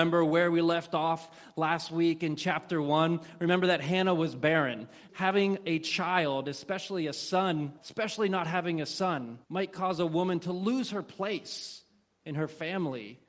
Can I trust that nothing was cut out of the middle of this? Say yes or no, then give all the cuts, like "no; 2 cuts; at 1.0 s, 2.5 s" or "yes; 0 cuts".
no; 3 cuts; at 5.1 s, 7.8 s, 9.4 s